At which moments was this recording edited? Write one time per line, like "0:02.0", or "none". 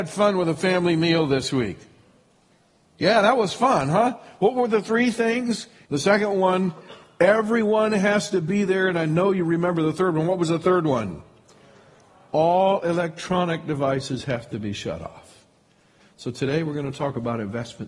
0:05.8
0:16.0